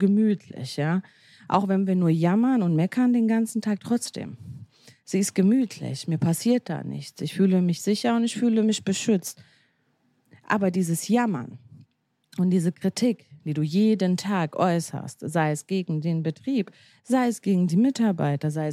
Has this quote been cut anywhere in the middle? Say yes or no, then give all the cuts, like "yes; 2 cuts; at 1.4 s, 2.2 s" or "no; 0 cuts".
no; 0 cuts